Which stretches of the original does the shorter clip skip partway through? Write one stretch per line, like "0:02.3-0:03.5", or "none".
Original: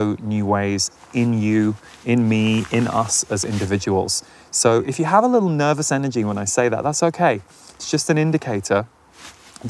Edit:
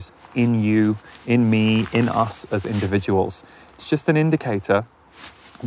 0:04.5-0:07.7